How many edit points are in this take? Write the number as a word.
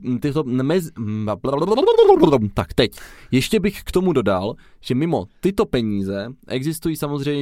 zero